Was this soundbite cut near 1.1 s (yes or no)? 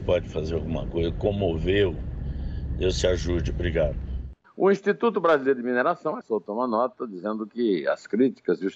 no